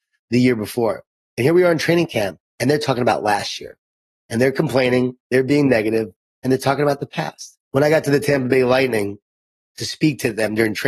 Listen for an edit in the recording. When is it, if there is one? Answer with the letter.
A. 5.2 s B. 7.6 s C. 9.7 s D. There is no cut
B